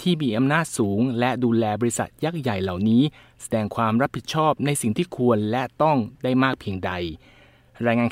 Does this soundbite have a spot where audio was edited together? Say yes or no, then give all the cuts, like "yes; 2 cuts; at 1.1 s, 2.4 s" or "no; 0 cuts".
no; 0 cuts